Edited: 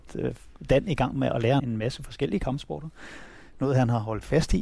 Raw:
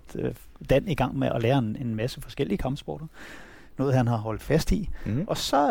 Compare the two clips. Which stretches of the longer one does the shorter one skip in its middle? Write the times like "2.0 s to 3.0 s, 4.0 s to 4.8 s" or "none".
1.6 s to 1.8 s